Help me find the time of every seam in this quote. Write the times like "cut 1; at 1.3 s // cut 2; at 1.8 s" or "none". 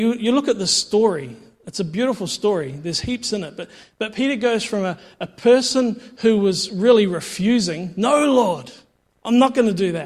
none